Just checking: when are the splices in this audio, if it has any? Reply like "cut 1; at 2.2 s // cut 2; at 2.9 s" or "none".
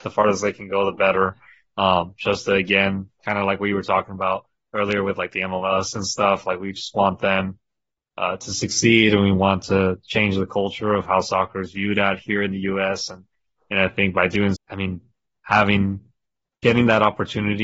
cut 1; at 14.6 s